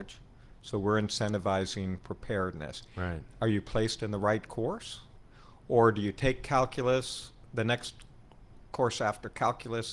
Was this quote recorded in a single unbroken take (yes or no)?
yes